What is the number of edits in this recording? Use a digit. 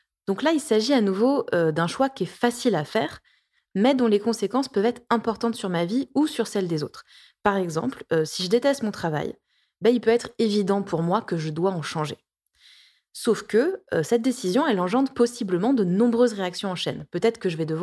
0